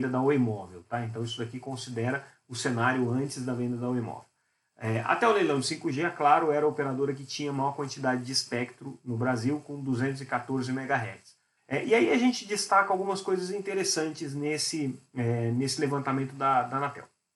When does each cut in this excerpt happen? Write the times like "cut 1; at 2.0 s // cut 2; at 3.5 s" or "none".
cut 1; at 11.6 s